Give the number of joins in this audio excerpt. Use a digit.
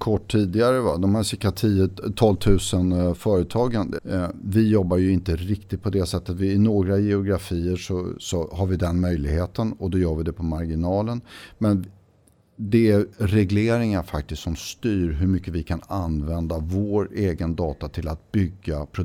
1